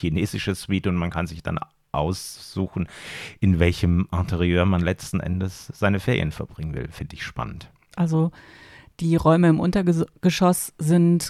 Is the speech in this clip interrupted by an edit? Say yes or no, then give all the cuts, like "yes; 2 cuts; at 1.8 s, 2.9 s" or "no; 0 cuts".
yes; 1 cut; at 7.9 s